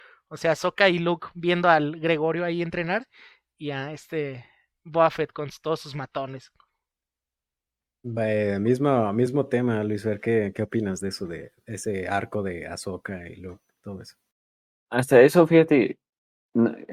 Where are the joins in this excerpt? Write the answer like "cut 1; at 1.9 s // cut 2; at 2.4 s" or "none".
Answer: none